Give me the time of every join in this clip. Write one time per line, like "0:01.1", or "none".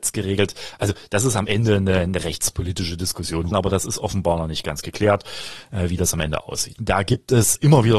0:03.5
0:06.8